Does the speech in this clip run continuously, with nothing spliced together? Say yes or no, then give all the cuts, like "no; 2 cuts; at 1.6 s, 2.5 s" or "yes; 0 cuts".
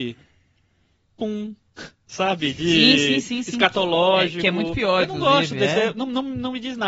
yes; 0 cuts